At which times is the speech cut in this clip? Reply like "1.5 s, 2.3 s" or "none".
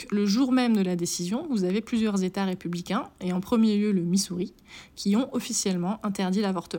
none